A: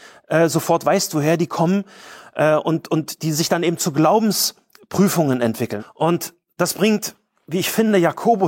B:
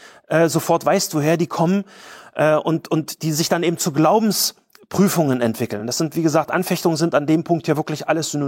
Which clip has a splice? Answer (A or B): A